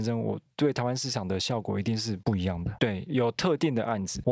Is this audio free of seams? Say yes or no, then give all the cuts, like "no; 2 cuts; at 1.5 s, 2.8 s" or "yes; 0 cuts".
no; 1 cut; at 2.8 s